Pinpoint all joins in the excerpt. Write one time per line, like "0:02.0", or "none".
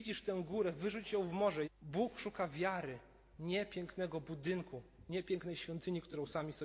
0:01.6